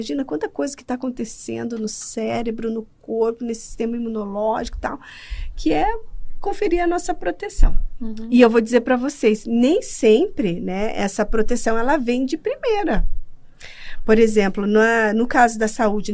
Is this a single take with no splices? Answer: yes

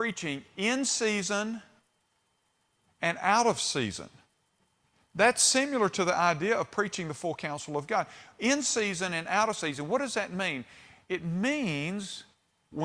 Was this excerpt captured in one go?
yes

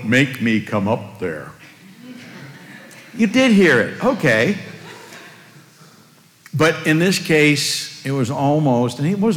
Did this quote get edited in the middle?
no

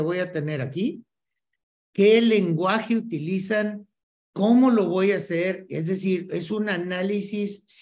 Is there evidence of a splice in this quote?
no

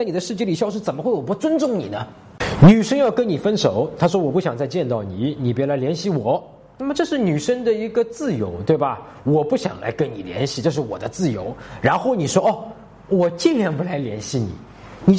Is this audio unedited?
yes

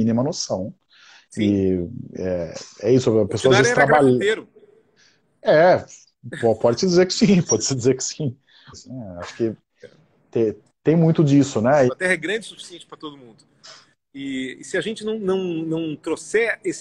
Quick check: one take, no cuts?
no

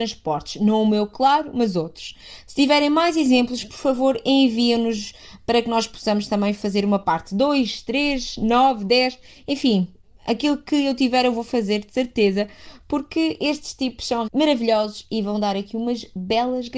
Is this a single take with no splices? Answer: no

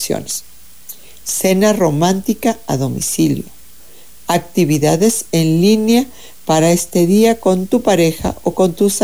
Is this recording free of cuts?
yes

